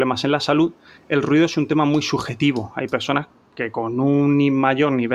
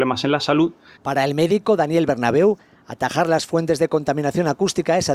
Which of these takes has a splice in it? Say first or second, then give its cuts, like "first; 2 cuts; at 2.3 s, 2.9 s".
second; 1 cut; at 1.0 s